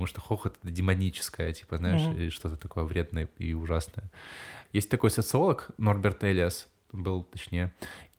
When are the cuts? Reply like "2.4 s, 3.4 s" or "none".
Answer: 4.7 s